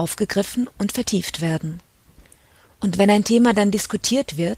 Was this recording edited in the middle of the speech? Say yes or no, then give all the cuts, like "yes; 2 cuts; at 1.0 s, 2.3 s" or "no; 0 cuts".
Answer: no; 0 cuts